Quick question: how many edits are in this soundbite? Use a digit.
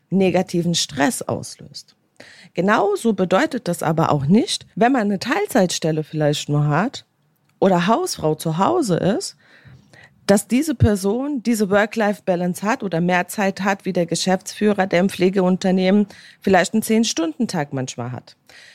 1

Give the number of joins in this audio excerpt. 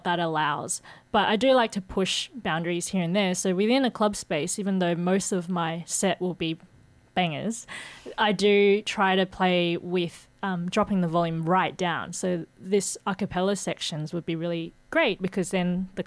0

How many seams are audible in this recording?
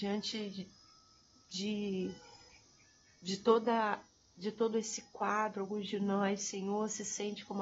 0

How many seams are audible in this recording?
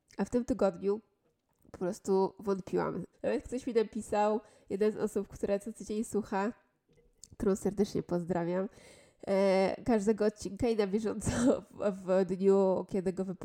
1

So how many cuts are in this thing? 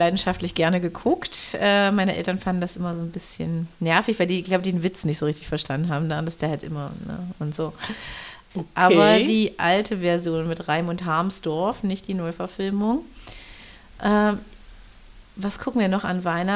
1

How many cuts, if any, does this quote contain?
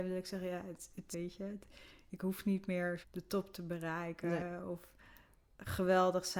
2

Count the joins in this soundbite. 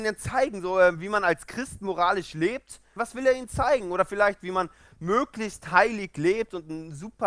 1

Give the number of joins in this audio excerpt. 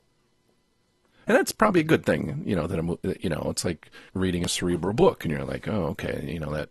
2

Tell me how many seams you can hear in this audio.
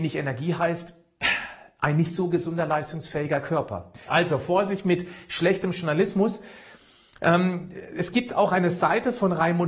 1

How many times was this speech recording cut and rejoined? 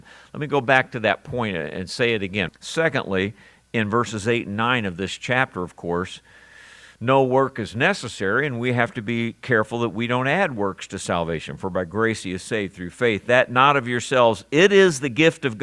1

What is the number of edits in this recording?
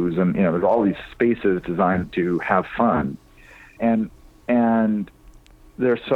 1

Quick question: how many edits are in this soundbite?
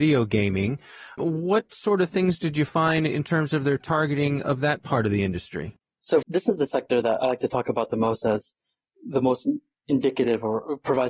1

